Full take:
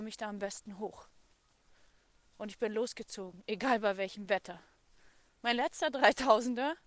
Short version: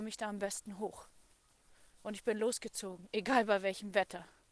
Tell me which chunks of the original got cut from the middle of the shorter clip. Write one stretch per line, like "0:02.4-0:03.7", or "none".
0:01.9-0:02.3